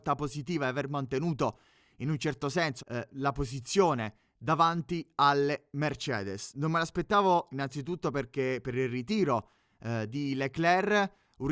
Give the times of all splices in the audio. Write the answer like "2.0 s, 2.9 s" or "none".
2.8 s